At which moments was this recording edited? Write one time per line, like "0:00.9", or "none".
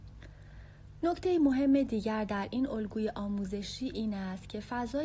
0:01.0